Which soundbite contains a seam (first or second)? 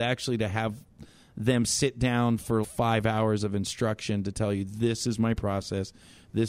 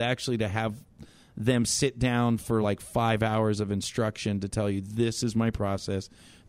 first